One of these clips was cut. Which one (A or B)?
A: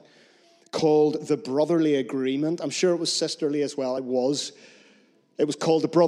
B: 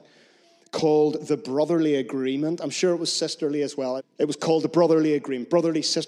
B